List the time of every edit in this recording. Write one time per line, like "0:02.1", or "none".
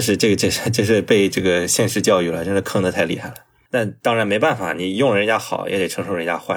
0:03.7